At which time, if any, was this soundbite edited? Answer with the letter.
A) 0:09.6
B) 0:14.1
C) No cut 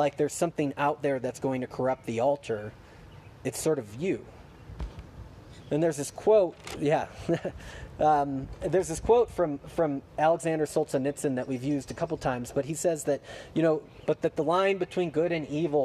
B